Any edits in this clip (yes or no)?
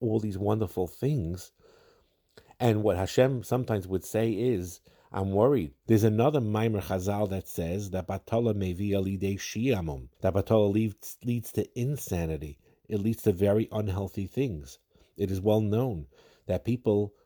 yes